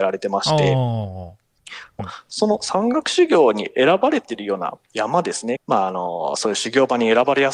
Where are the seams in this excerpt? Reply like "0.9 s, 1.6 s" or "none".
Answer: 2.0 s, 5.6 s

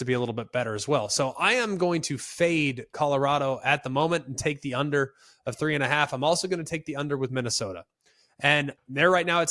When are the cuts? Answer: none

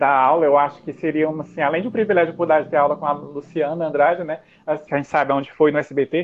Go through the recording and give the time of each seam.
4.9 s

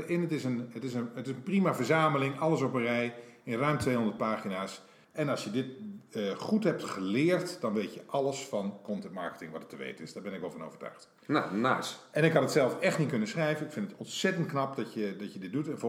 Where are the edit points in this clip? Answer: 5.0 s

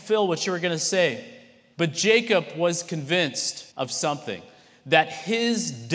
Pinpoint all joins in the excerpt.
1.7 s, 3.7 s

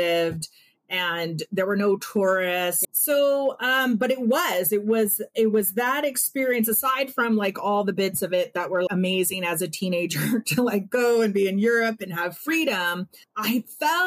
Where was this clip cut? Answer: 2.8 s, 8.9 s

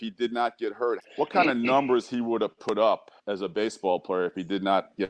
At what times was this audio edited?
1.0 s, 3.2 s

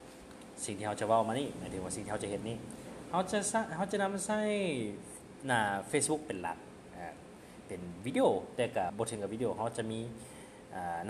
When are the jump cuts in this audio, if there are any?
8.9 s

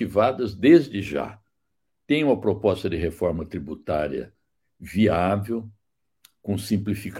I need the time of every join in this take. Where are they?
1.9 s

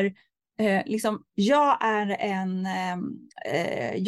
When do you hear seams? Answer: 1.3 s

